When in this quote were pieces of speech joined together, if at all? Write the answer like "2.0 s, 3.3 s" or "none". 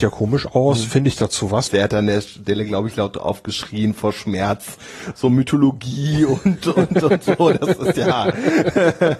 1.7 s